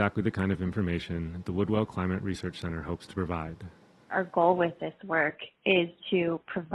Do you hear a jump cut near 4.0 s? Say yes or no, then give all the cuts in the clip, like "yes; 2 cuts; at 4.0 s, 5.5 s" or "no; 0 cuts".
yes; 1 cut; at 4.0 s